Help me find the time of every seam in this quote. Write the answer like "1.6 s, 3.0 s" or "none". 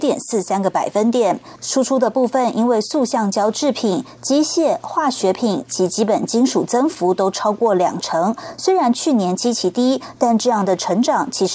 none